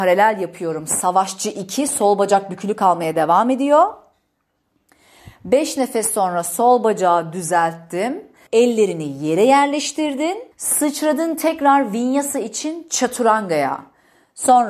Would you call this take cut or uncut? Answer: cut